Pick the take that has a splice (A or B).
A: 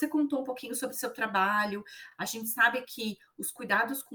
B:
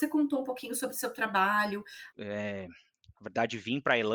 B